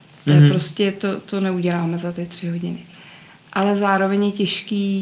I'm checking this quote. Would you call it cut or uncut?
uncut